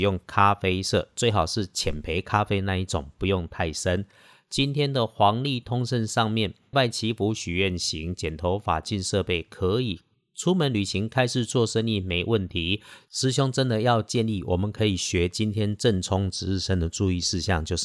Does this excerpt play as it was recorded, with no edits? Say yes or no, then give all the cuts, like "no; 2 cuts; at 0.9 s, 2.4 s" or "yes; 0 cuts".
no; 1 cut; at 6.7 s